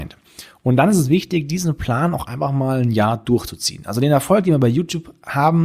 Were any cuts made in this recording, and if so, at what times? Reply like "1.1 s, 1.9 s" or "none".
none